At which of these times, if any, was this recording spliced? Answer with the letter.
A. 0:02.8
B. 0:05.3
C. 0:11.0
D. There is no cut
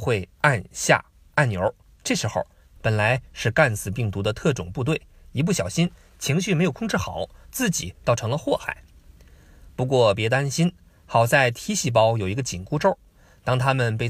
A